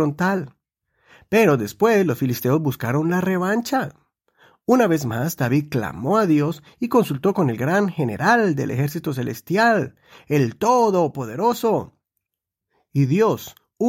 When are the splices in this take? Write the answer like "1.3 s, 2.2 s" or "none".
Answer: none